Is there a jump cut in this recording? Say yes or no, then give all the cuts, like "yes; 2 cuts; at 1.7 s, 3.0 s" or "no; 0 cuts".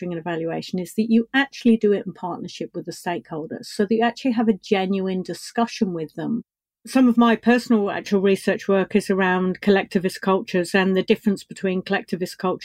no; 0 cuts